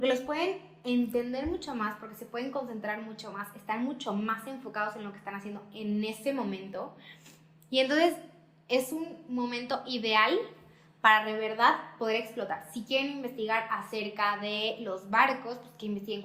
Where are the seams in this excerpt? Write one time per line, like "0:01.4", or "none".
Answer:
none